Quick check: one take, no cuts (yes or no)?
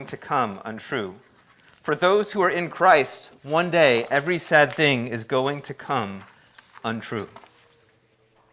yes